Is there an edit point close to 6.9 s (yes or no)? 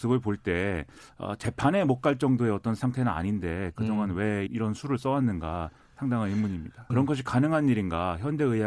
yes